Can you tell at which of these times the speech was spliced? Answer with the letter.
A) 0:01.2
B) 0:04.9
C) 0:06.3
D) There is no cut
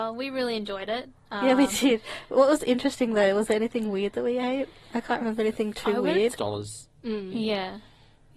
C